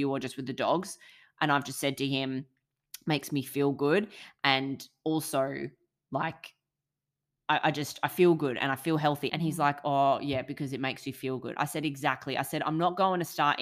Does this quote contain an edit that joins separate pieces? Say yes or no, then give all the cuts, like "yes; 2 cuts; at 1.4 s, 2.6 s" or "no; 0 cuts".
yes; 1 cut; at 9.3 s